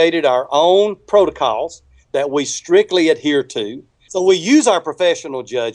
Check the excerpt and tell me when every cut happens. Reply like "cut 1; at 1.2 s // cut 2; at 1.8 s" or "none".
cut 1; at 4.1 s